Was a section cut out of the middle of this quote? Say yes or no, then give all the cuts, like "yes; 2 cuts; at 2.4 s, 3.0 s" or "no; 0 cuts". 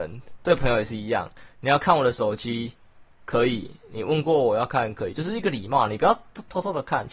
yes; 1 cut; at 3.1 s